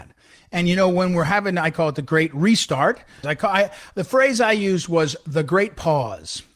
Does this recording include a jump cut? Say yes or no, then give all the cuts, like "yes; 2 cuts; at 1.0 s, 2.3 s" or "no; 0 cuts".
yes; 1 cut; at 3.2 s